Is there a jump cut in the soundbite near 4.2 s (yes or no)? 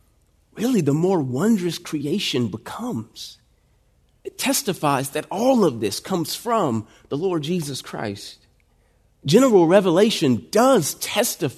yes